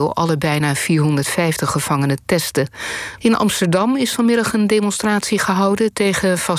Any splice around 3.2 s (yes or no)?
yes